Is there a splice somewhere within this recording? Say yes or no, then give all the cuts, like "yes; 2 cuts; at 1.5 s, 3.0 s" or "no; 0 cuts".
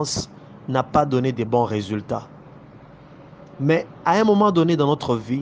no; 0 cuts